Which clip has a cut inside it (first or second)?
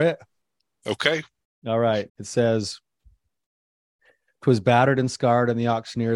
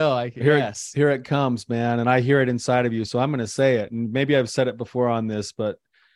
first